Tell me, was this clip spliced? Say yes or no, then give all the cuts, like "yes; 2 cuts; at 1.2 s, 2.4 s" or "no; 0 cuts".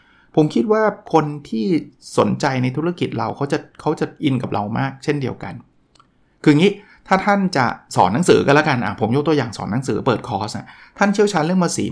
yes; 1 cut; at 1.0 s